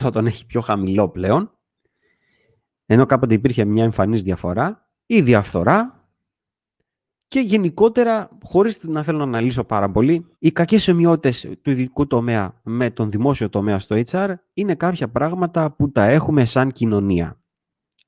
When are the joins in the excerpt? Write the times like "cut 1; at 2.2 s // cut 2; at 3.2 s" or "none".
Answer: cut 1; at 5.0 s // cut 2; at 10.3 s